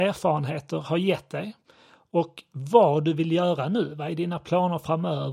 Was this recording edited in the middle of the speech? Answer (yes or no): no